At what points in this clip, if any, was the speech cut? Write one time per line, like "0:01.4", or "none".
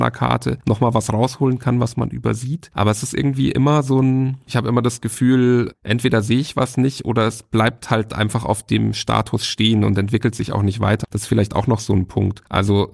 0:04.5
0:11.0